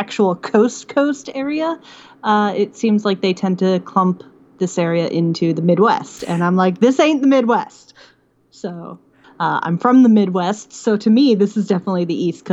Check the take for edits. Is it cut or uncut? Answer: cut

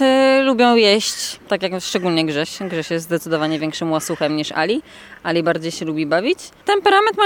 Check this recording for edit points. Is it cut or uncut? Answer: uncut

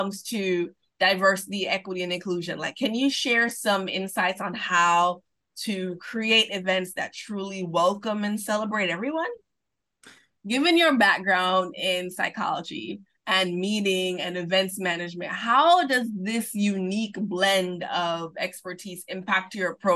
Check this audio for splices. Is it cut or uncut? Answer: cut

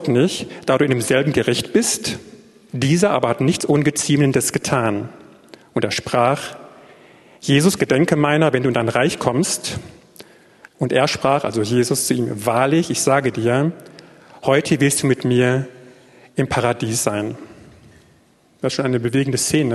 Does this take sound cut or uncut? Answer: cut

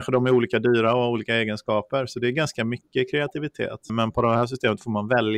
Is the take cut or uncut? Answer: cut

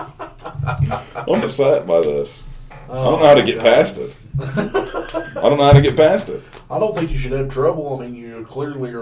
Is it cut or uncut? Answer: cut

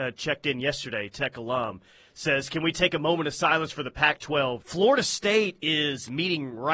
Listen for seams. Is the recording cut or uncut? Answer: cut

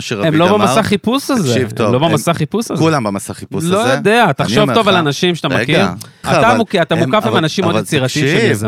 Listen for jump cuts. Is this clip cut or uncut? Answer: cut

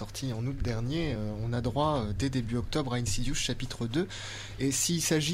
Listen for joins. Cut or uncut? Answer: uncut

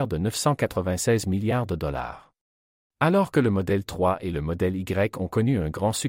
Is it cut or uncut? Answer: cut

